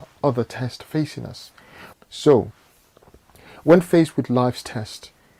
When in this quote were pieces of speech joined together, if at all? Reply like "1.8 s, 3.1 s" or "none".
1.9 s